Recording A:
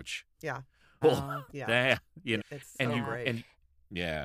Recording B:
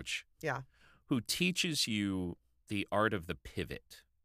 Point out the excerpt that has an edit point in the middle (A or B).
A